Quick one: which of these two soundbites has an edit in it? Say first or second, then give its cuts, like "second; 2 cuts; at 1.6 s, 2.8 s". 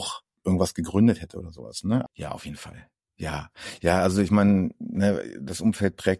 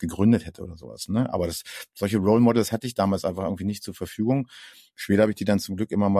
first; 1 cut; at 2.1 s